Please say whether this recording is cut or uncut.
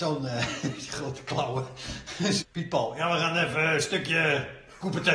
cut